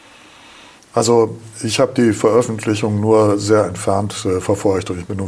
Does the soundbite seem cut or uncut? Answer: uncut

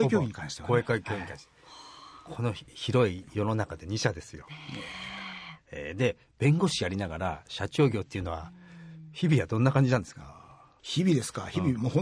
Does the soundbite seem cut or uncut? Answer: uncut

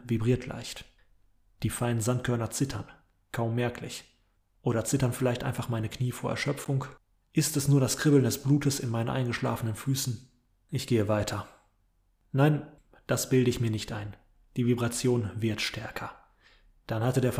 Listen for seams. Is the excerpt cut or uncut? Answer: uncut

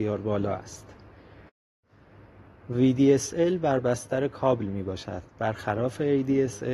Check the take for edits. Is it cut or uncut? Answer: uncut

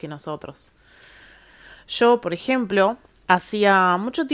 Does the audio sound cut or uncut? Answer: uncut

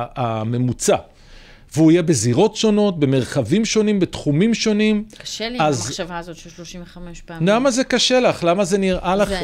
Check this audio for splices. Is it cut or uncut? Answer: uncut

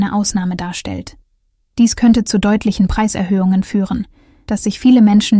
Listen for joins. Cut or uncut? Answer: cut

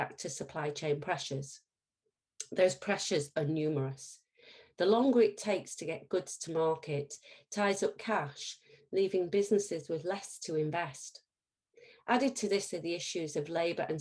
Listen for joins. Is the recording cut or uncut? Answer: uncut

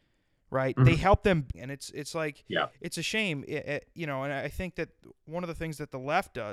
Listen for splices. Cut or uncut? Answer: cut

